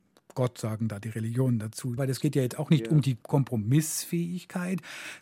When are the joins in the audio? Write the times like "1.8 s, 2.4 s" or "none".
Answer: 2.0 s